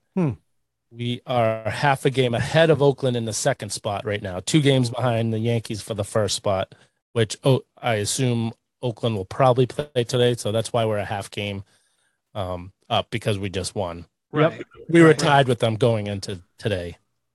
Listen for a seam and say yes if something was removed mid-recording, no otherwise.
no